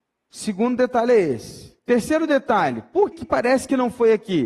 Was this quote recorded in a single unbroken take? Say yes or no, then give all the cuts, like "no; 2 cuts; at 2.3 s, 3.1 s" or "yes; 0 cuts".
no; 2 cuts; at 1.8 s, 3.1 s